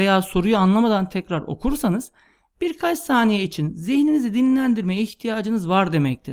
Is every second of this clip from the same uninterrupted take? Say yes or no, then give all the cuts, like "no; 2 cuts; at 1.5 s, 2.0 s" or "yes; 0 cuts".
no; 1 cut; at 1.1 s